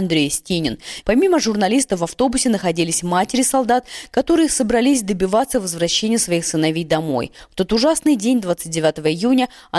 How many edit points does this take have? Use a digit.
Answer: 1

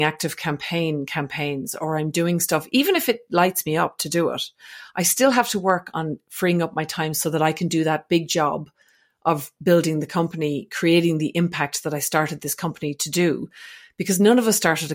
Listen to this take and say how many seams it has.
0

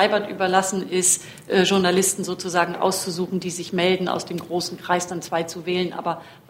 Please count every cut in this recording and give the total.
0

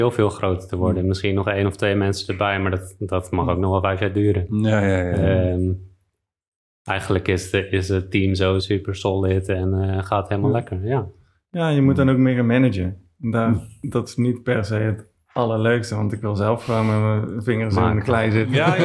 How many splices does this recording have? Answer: 1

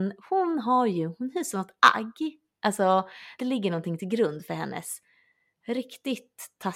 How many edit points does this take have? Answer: 1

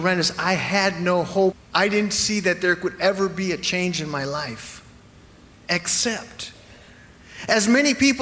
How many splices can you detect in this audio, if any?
1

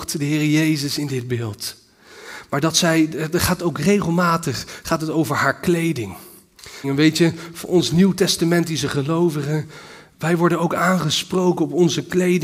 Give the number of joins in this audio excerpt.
1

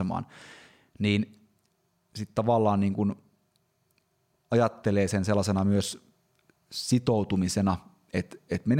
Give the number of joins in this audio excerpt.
0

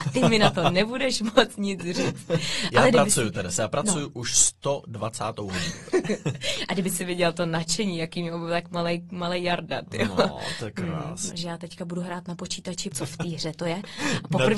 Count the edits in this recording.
2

